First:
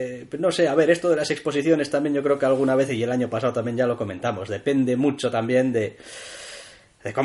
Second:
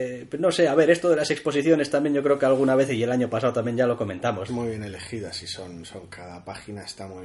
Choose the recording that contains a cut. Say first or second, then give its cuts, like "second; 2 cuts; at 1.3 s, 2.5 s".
second; 1 cut; at 4.5 s